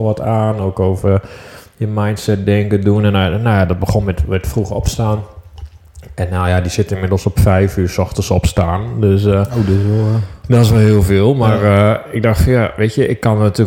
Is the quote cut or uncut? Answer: uncut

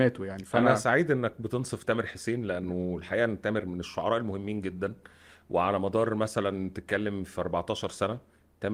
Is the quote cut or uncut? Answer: uncut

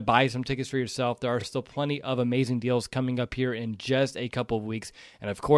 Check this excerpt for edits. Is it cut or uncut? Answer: uncut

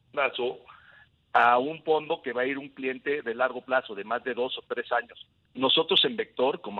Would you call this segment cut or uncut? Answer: cut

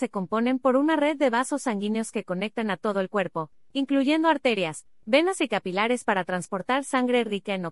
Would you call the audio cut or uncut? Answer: uncut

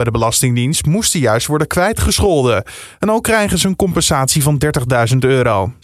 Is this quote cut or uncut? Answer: uncut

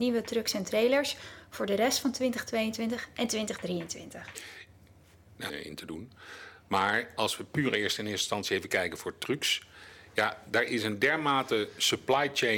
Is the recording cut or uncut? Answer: cut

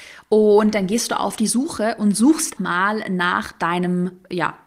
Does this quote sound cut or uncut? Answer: cut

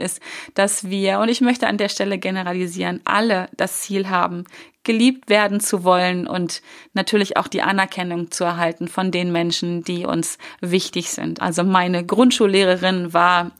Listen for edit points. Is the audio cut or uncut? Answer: cut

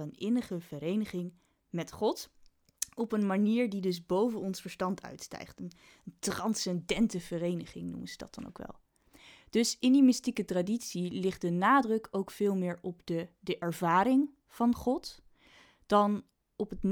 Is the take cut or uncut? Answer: uncut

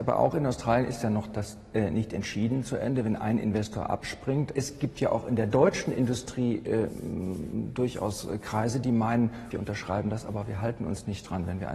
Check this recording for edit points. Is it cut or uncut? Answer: cut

